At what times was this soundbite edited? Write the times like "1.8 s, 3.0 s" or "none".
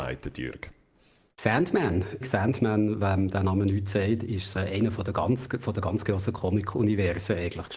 2.2 s, 4.6 s